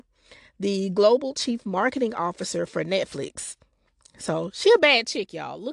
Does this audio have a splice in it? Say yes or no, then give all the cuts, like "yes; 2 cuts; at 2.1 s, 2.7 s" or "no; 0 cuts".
no; 0 cuts